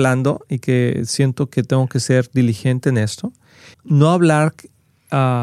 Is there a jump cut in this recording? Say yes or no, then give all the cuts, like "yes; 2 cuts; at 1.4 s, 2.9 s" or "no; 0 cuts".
yes; 1 cut; at 3.7 s